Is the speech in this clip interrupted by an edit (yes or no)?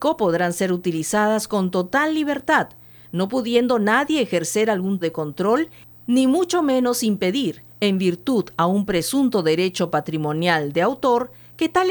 yes